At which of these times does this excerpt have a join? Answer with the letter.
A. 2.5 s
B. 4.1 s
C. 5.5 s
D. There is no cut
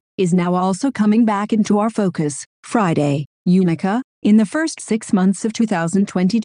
A